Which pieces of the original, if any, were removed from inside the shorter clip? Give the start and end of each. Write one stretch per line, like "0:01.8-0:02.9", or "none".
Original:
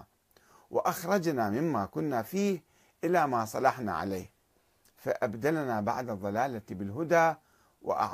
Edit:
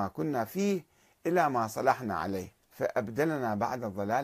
0:04.4-0:04.9